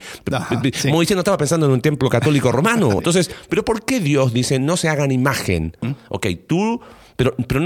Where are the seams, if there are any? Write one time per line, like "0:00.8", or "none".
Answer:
0:03.0
0:05.8